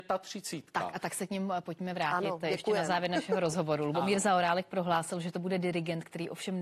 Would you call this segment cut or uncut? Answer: uncut